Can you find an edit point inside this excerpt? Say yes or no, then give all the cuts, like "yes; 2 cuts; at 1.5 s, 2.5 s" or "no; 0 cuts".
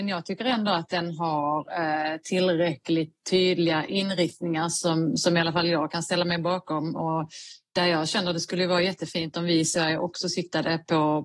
no; 0 cuts